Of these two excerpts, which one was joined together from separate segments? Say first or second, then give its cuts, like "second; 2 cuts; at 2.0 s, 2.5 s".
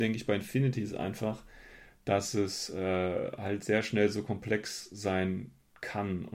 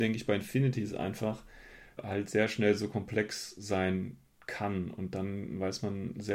second; 1 cut; at 2.0 s